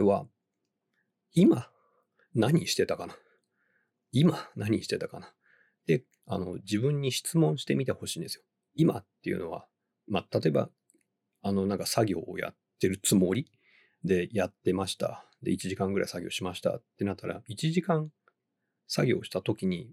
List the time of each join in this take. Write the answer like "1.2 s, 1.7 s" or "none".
none